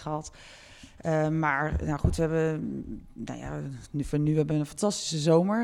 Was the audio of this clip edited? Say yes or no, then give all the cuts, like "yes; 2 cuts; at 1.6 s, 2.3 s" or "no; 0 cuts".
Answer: yes; 1 cut; at 1.0 s